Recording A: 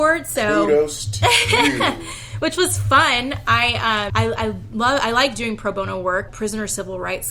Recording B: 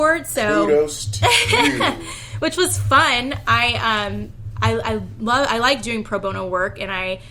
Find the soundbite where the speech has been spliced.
A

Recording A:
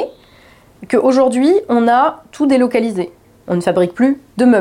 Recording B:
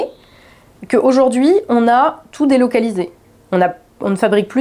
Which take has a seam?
A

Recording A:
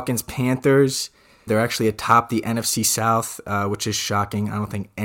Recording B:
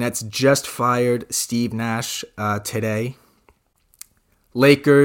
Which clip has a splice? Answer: A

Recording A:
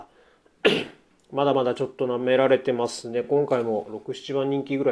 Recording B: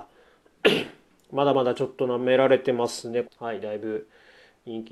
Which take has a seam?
B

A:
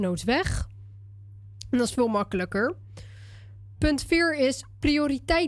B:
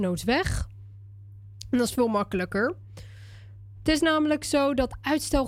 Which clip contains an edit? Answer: B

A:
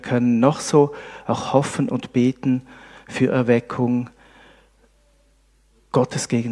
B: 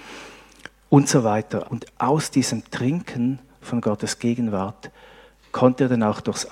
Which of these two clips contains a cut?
B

